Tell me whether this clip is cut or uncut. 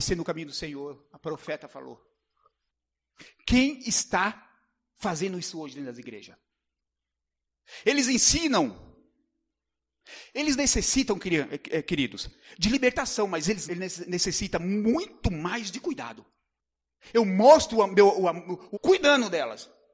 cut